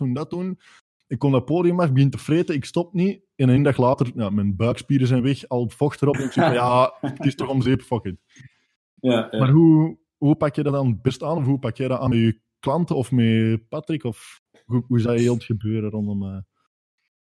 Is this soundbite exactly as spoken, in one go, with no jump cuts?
yes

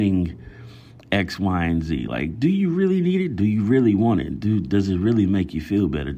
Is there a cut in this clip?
no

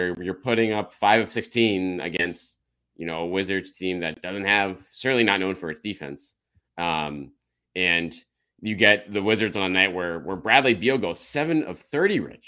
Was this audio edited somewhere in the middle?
no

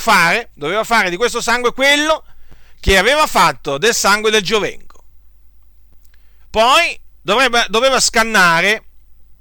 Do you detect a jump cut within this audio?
yes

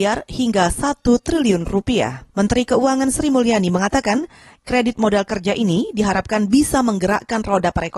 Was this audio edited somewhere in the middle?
yes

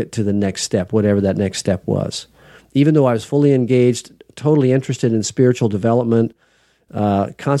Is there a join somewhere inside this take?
no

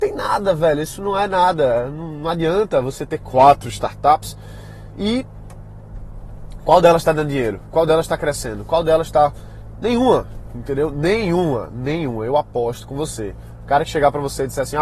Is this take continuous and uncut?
yes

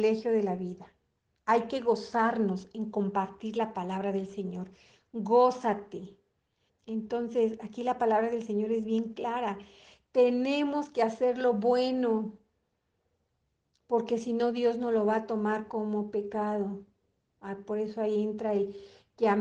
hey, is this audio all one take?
no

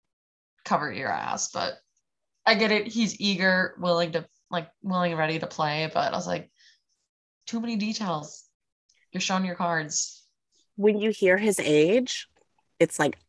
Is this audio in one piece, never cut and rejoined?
yes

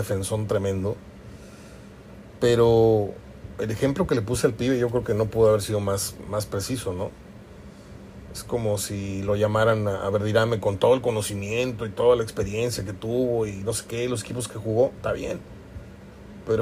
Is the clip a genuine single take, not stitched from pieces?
yes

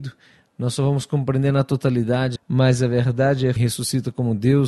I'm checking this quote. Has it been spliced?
yes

